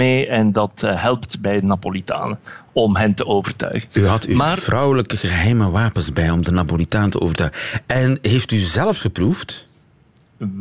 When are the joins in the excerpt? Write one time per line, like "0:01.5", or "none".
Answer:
none